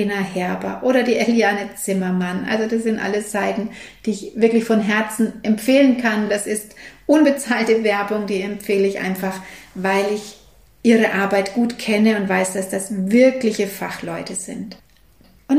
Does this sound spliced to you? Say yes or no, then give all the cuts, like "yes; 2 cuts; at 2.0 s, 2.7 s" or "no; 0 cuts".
no; 0 cuts